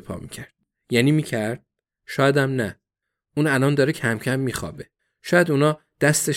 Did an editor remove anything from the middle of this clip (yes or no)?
no